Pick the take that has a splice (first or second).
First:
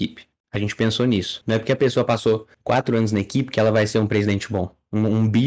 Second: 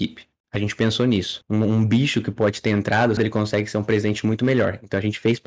second